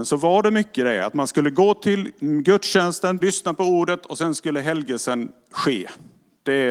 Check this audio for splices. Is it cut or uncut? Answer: cut